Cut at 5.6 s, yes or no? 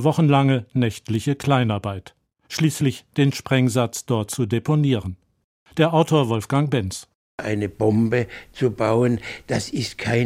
no